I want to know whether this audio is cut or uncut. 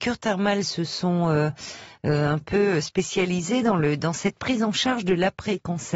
uncut